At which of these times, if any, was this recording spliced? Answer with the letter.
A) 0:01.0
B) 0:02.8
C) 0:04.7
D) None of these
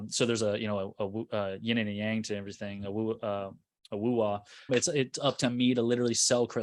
C